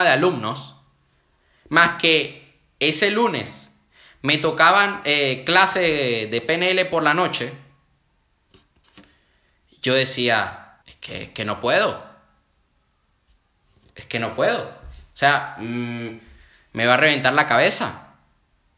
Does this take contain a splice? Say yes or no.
yes